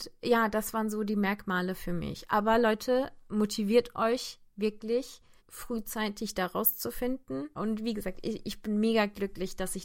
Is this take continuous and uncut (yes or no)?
no